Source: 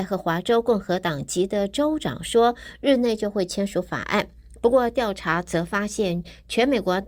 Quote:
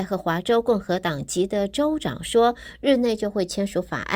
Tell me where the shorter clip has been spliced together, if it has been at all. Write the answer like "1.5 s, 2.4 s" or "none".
none